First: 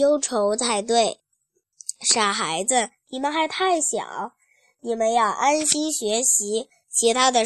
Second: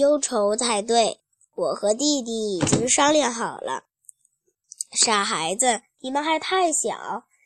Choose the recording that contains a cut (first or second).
first